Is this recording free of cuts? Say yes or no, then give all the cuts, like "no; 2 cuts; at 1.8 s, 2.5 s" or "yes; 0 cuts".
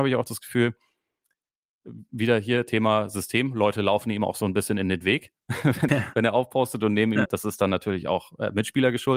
no; 2 cuts; at 5.9 s, 7.3 s